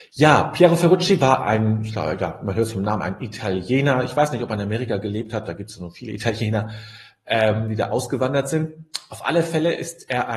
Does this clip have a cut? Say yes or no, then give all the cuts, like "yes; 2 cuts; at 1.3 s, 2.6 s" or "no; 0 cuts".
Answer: no; 0 cuts